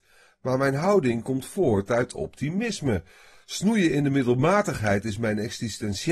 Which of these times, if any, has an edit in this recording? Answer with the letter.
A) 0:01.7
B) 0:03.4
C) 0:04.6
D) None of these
D